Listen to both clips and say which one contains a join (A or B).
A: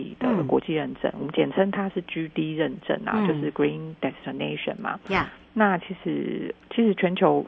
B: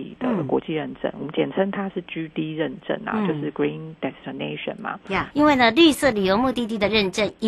B